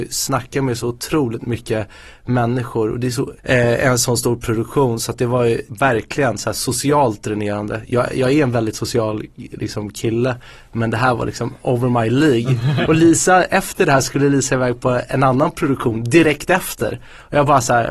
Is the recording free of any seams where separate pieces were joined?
no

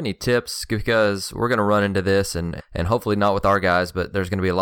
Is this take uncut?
no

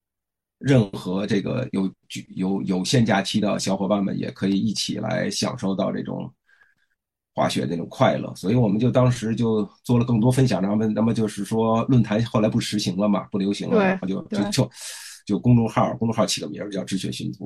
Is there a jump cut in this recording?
no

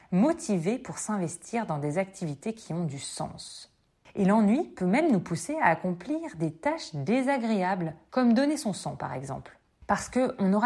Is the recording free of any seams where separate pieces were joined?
no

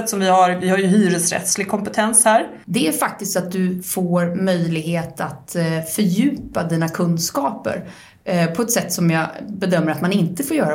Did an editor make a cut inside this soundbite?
yes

